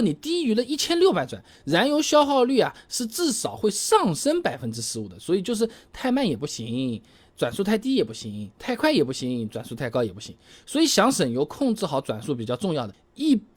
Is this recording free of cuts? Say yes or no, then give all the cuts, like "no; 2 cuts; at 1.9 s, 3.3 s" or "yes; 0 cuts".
yes; 0 cuts